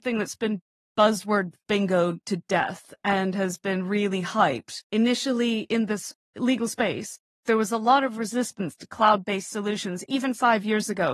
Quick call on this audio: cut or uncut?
cut